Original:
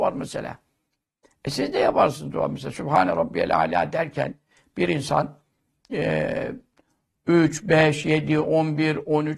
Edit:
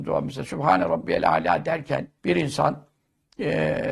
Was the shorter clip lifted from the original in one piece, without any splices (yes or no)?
no